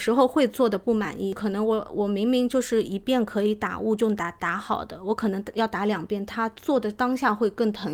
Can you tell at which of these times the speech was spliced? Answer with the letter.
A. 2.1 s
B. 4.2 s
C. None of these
C